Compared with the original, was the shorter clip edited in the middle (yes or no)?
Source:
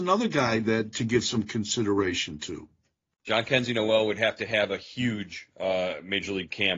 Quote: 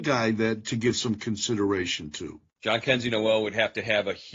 yes